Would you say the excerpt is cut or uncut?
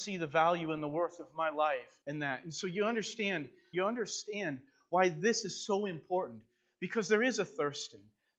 cut